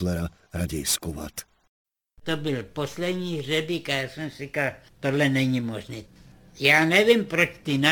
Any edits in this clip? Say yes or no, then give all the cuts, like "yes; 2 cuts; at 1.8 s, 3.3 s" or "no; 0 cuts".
no; 0 cuts